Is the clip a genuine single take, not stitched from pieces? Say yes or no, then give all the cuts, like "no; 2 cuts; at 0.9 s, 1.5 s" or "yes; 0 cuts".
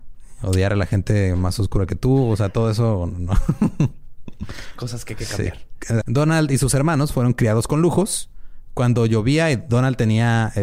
no; 1 cut; at 6.0 s